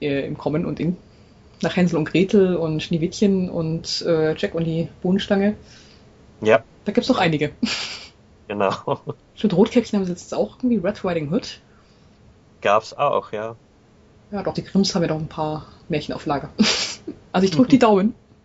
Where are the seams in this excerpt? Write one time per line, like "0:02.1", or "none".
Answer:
0:14.5